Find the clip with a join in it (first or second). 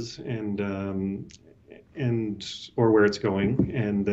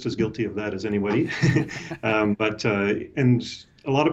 second